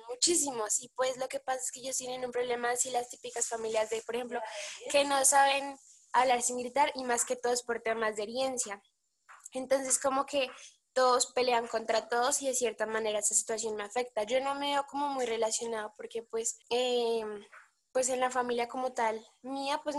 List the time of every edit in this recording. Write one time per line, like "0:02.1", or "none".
0:16.6